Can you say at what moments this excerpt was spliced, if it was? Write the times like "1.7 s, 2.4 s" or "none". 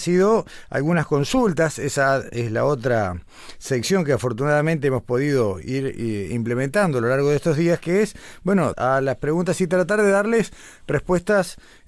8.7 s